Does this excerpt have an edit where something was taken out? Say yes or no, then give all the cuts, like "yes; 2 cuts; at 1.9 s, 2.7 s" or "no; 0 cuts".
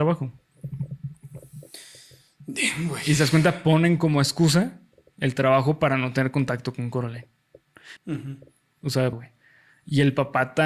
yes; 2 cuts; at 8.0 s, 9.1 s